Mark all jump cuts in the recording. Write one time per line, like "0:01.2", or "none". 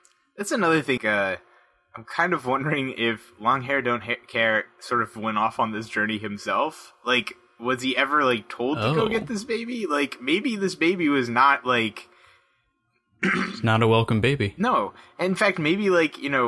0:01.0

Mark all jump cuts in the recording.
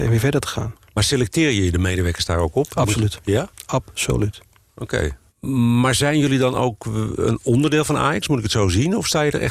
0:05.3

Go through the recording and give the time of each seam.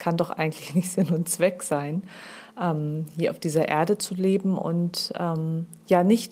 none

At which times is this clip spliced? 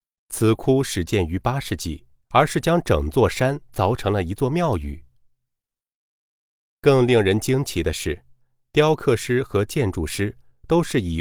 0:02.2

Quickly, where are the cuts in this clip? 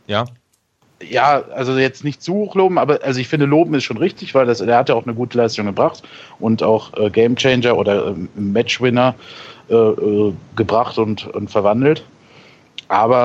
none

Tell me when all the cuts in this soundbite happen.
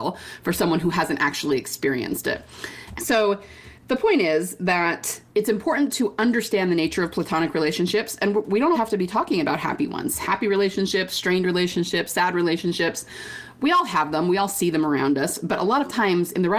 0:03.0
0:05.3
0:08.7

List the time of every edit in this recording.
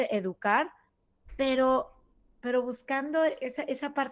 none

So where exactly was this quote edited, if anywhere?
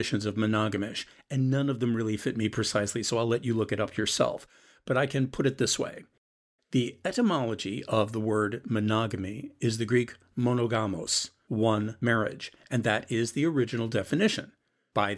none

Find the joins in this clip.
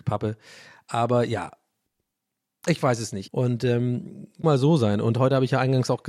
0:03.3
0:04.4

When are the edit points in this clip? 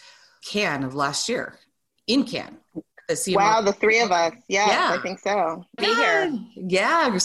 0:05.8

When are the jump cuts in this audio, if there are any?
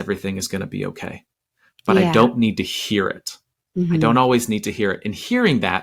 none

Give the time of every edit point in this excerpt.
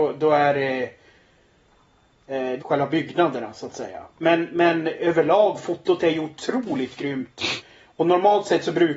0:02.6

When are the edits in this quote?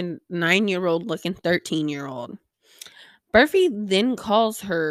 none

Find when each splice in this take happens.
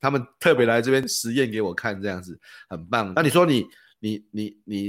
0:03.1

